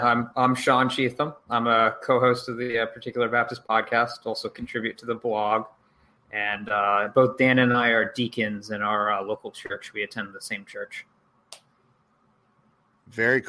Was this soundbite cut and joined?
no; 0 cuts

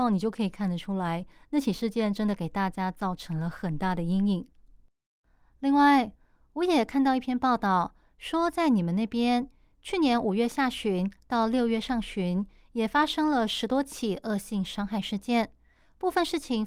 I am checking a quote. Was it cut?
no; 0 cuts

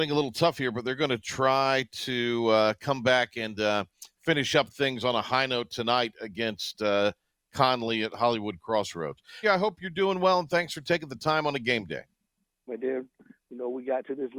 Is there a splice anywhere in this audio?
yes; 2 cuts; at 9.4 s, 12.7 s

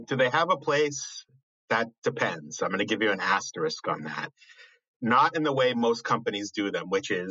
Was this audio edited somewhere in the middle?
no; 0 cuts

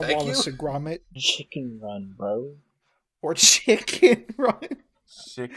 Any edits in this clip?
yes; 1 cut; at 1.2 s

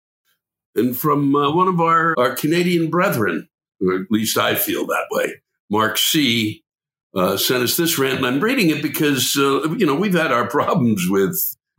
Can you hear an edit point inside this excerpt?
yes; 1 cut; at 2.1 s

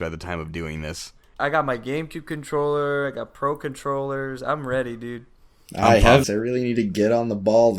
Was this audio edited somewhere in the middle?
yes; 2 cuts; at 1.4 s, 6.2 s

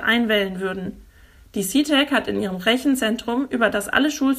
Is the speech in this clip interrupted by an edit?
no; 0 cuts

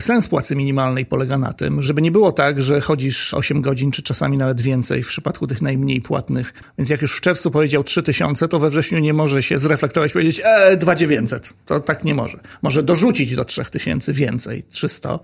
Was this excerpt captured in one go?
no; 1 cut; at 6.6 s

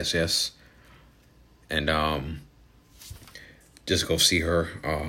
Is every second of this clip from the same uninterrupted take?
yes; 0 cuts

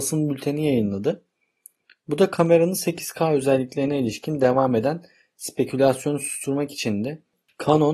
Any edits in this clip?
no; 0 cuts

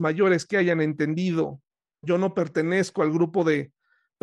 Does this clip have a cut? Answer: yes; 1 cut; at 2.0 s

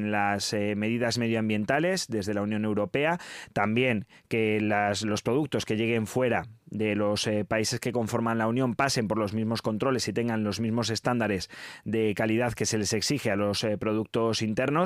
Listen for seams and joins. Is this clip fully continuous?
yes; 0 cuts

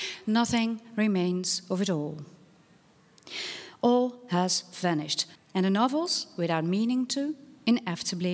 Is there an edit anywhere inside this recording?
yes; 1 cut; at 5.4 s

